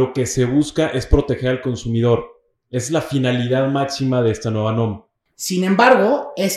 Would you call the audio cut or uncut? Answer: cut